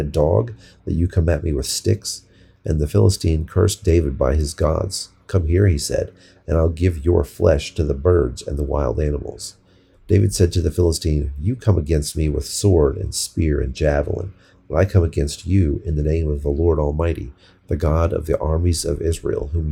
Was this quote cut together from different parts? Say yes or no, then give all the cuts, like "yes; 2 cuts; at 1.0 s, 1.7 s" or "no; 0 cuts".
no; 0 cuts